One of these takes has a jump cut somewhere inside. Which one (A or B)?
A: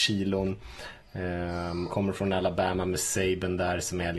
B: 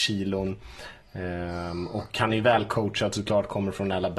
A